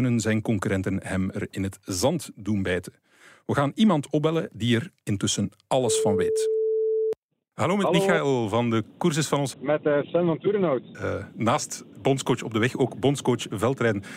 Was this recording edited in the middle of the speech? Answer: yes; 2 cuts; at 9.5 s, 10.9 s

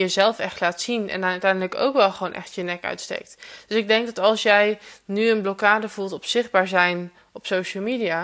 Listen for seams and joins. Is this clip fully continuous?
yes; 0 cuts

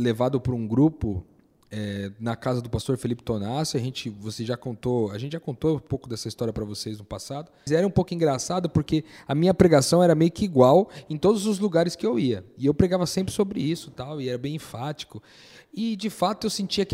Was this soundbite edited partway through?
yes; 1 cut; at 7.7 s

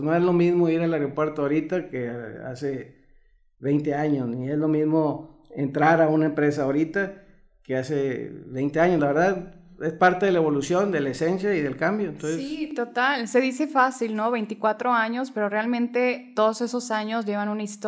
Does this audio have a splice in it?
no; 0 cuts

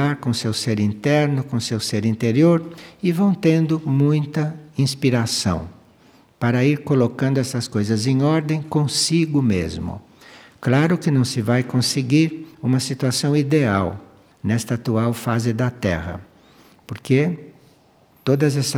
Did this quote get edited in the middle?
no; 0 cuts

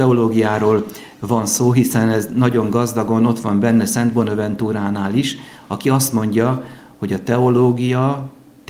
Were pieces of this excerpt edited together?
no; 0 cuts

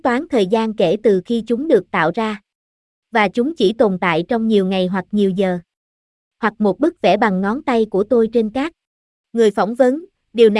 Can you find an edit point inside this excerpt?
yes; 2 cuts; at 6.3 s, 9.2 s

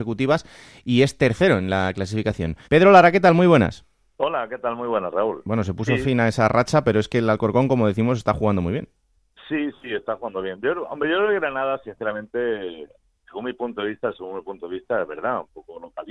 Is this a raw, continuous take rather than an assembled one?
no; 1 cut; at 2.6 s

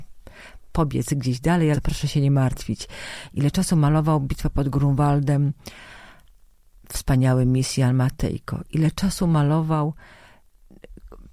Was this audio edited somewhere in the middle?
yes; 1 cut; at 1.7 s

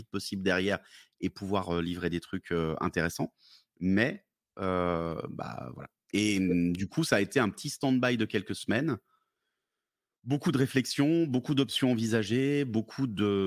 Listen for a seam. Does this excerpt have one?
no; 0 cuts

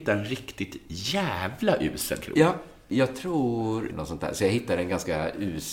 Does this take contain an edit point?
yes; 1 cut; at 3.9 s

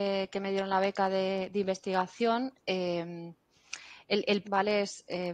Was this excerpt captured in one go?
no; 1 cut; at 4.4 s

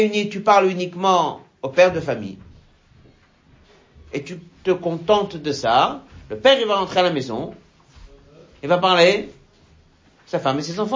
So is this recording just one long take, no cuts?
yes; 0 cuts

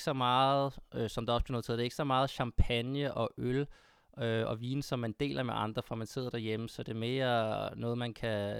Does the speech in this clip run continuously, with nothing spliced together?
yes; 0 cuts

